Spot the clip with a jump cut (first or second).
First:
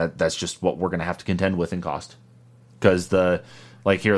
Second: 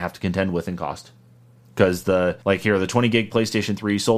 second